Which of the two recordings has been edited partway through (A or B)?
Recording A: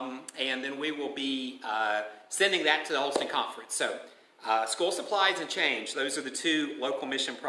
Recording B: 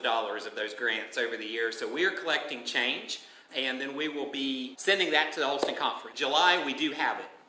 B